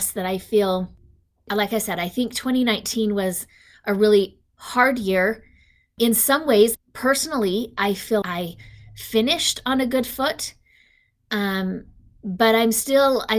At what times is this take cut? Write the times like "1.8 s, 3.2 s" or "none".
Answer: 6.7 s, 8.2 s